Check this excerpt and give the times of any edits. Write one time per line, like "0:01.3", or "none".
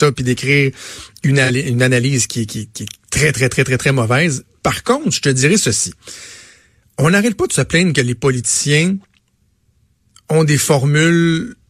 none